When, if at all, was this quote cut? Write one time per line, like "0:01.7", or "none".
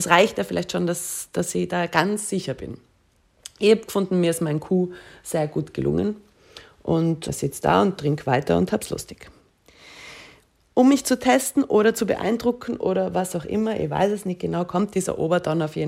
none

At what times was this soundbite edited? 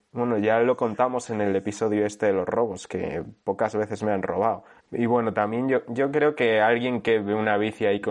0:04.8

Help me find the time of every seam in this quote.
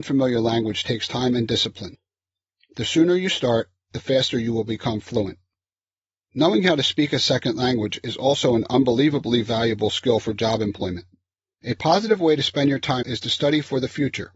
0:11.5
0:13.0

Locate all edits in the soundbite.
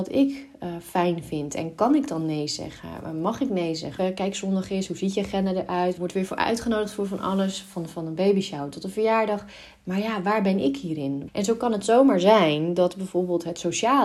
0:04.0
0:06.0
0:11.3

